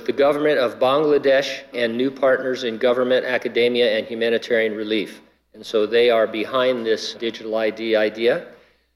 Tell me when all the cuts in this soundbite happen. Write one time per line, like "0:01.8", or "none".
0:01.7
0:05.4
0:07.1